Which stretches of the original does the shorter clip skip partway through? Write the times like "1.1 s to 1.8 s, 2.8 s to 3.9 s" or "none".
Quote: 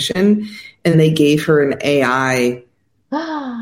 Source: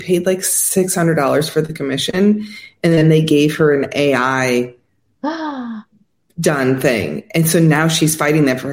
2.9 s to 3.0 s